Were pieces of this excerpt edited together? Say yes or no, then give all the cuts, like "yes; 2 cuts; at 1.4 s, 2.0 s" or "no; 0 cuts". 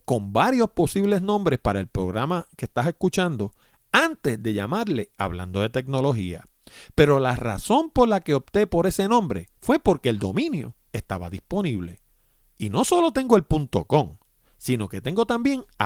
yes; 1 cut; at 9.6 s